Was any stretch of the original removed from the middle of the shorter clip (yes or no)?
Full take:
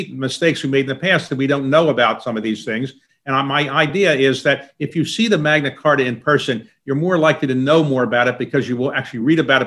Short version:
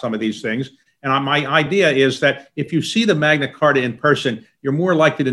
no